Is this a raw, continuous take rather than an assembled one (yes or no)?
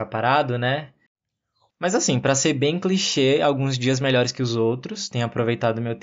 no